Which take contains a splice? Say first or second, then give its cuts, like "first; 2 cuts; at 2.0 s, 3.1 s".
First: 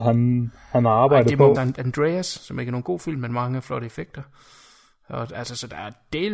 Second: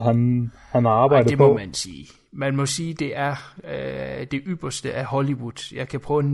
first; 2 cuts; at 1.5 s, 5.3 s